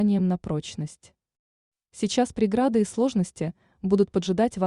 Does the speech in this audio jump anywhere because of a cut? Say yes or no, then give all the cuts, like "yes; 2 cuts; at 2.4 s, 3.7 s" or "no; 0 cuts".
no; 0 cuts